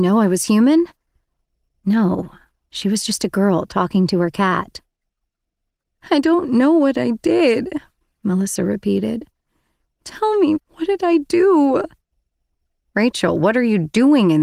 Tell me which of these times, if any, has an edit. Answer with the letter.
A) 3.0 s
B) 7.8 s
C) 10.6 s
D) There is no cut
C